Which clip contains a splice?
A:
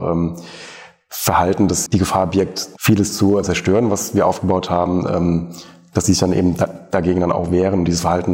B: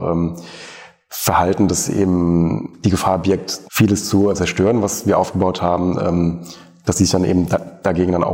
A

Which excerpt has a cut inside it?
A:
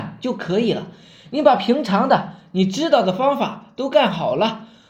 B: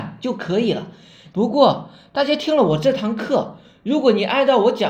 B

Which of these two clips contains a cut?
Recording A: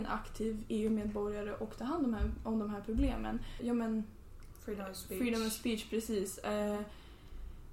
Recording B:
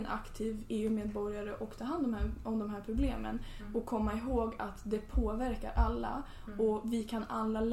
A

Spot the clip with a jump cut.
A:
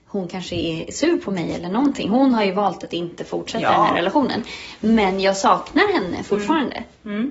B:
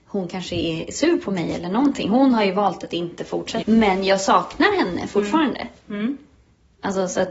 B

